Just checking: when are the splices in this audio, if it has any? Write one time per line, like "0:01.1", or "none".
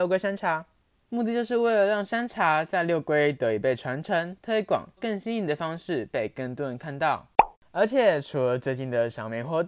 0:01.0
0:05.0